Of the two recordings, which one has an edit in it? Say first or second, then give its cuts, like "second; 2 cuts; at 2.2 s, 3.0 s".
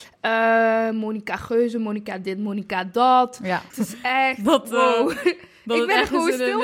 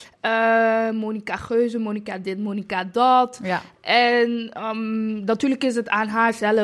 first; 1 cut; at 3.7 s